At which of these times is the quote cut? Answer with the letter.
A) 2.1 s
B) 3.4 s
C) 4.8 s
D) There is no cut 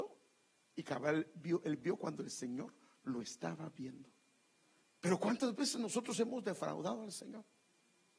C